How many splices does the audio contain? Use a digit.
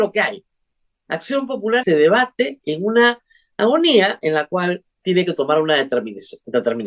2